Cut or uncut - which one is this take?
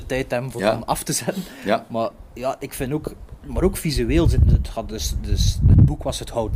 uncut